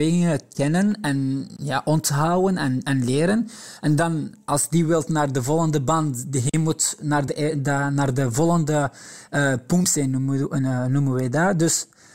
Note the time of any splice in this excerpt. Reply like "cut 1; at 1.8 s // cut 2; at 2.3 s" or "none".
none